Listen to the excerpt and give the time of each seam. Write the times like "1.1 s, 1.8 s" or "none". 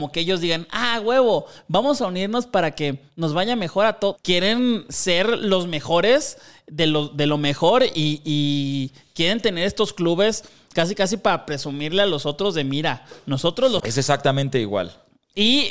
4.2 s, 13.8 s